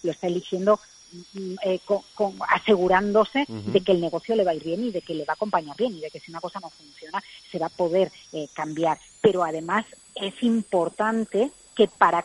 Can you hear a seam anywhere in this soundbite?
yes; 1 cut; at 9.1 s

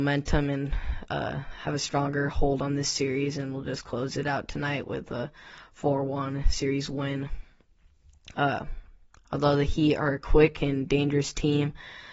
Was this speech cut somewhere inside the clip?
yes; 1 cut; at 8.3 s

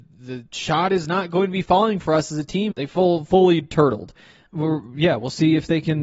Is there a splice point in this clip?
yes; 2 cuts; at 2.7 s, 4.5 s

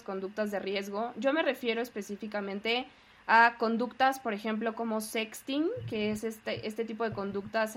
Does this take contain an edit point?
no; 0 cuts

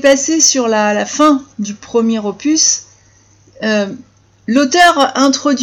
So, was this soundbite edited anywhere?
no; 0 cuts

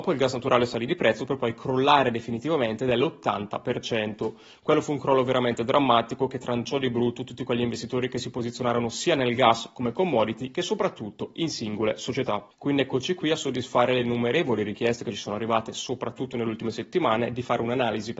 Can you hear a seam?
no; 0 cuts

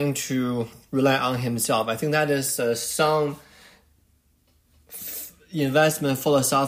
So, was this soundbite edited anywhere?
no; 0 cuts

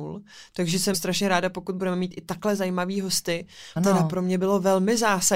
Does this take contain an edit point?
yes; 2 cuts; at 0.9 s, 3.8 s

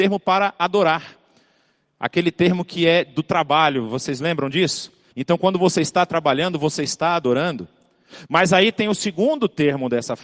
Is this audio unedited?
no; 1 cut; at 5.1 s

